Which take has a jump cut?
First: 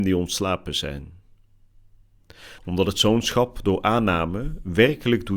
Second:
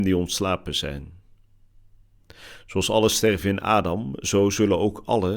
first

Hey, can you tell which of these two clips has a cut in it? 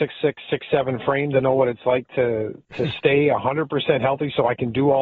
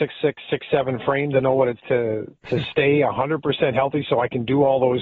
second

